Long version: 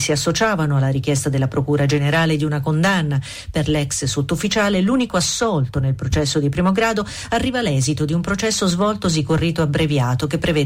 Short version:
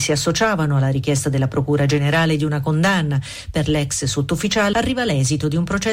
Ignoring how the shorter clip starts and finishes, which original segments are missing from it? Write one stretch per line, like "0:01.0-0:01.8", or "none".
0:04.7-0:07.3